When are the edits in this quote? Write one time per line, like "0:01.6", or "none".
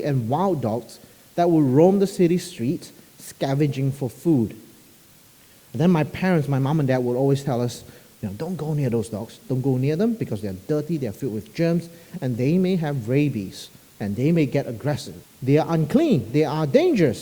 0:05.5
0:09.4
0:15.2